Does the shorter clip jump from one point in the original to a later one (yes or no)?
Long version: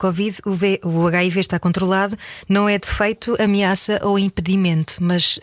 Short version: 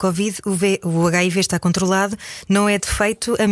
no